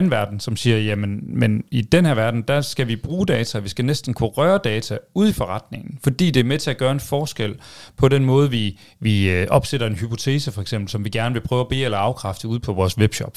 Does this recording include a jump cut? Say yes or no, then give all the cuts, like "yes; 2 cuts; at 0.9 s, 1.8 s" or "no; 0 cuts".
no; 0 cuts